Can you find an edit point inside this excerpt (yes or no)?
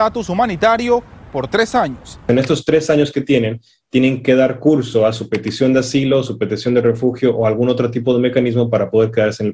no